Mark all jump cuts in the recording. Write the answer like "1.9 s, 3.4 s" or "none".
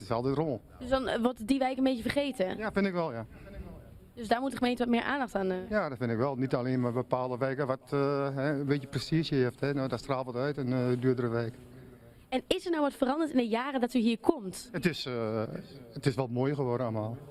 none